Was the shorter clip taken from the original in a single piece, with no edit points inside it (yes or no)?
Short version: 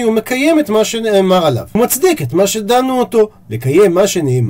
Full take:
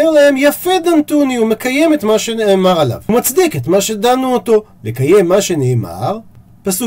yes